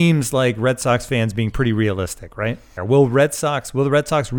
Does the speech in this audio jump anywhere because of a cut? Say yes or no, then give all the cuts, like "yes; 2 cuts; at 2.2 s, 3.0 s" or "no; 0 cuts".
yes; 1 cut; at 2.8 s